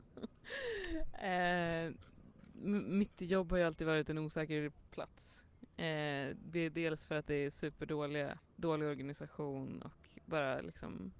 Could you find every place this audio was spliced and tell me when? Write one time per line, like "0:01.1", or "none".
0:08.4